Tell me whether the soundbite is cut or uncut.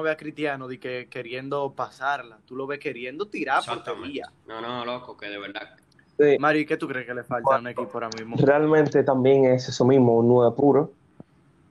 cut